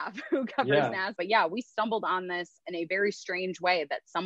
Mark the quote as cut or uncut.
cut